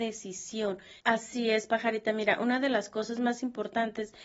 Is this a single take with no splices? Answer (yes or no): no